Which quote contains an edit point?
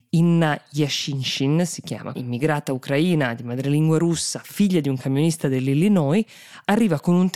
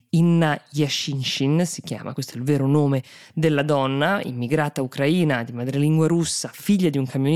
first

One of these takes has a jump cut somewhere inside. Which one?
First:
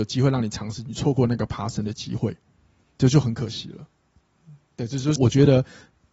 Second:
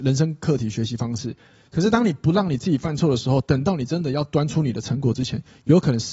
first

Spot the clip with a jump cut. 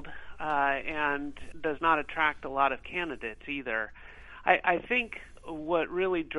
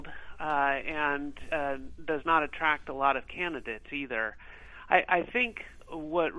first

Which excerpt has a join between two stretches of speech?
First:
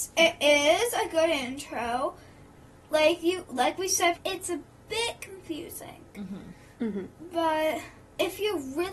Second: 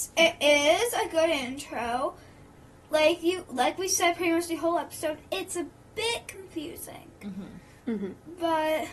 first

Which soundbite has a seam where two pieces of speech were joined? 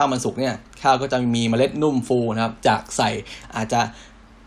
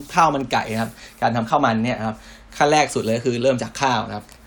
first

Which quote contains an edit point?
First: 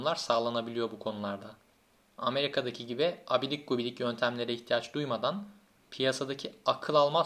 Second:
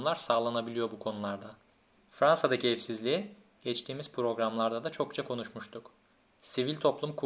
second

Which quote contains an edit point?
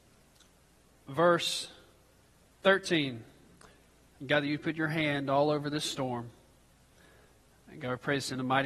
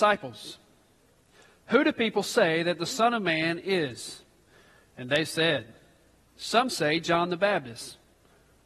first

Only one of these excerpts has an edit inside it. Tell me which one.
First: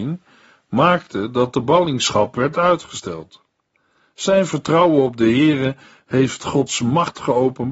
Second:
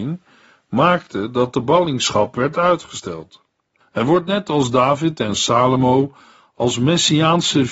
second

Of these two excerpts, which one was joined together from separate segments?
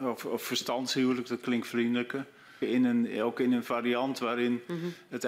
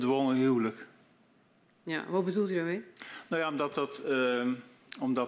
first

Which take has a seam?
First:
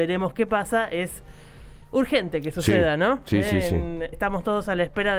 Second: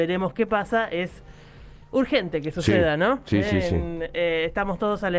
first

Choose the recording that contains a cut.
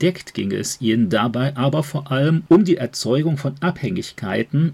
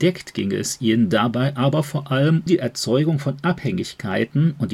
second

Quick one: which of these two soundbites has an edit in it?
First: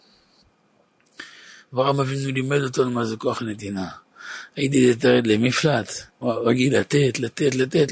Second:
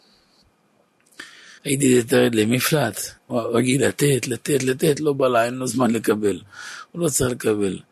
second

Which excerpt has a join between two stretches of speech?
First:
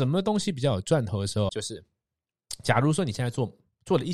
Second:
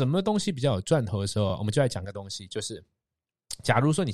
first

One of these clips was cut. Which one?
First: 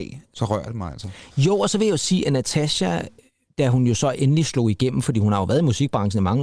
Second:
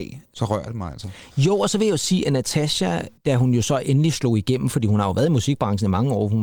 second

